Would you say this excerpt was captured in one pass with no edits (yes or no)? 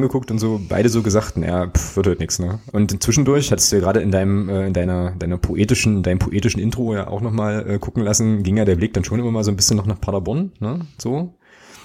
no